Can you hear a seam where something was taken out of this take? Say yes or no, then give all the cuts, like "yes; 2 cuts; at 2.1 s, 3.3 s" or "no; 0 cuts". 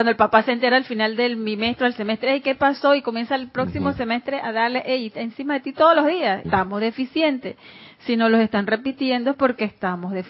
yes; 1 cut; at 6.4 s